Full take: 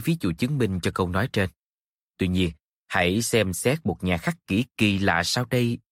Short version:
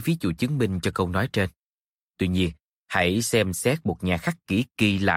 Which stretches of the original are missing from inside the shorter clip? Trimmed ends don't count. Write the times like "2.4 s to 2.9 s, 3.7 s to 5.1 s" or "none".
none